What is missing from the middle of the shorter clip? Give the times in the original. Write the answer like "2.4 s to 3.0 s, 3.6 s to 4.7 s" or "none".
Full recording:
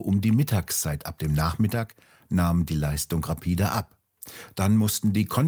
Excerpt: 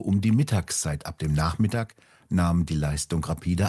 none